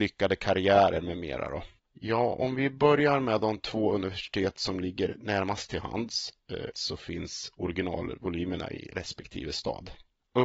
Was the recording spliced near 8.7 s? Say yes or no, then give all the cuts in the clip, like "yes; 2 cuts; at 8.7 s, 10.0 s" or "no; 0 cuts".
no; 2 cuts; at 1.8 s, 6.7 s